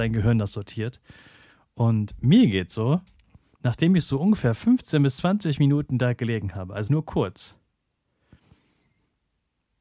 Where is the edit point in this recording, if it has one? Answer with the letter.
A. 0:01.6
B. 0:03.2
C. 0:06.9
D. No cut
C